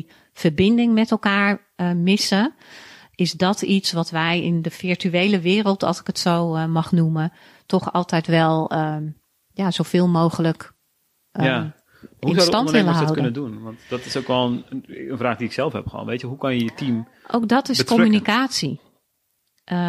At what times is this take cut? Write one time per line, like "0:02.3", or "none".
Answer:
none